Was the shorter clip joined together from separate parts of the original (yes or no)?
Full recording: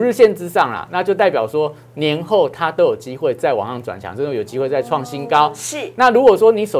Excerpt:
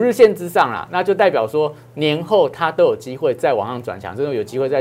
no